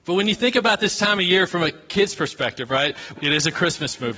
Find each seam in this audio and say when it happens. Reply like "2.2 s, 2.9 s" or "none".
3.2 s